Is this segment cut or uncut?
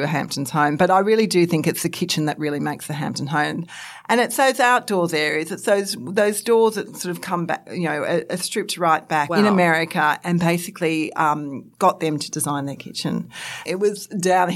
cut